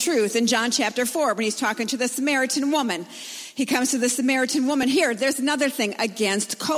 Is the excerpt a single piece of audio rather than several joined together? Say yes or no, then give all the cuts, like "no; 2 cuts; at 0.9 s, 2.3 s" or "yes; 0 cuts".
yes; 0 cuts